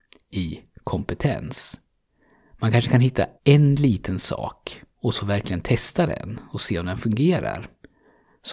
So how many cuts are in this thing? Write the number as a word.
two